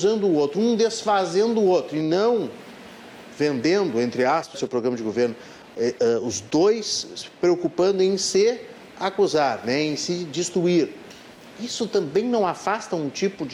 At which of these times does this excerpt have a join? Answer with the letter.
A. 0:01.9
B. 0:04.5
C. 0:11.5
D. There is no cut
B